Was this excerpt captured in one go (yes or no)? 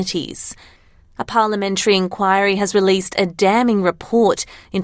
no